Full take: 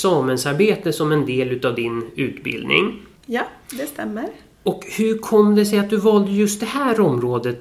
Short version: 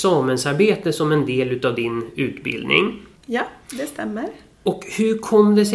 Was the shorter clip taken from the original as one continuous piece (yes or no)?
yes